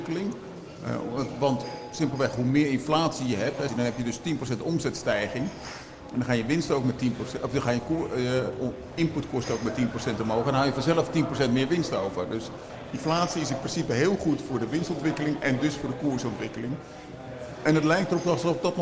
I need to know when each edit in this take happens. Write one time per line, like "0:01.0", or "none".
0:03.7